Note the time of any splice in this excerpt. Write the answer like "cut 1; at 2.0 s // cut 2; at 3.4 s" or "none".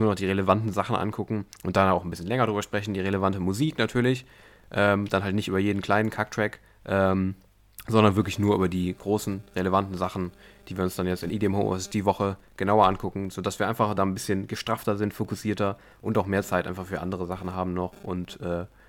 none